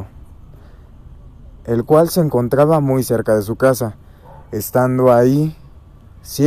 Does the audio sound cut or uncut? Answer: uncut